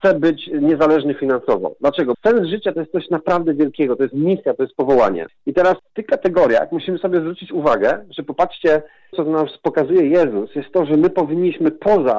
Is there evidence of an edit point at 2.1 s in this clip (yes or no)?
yes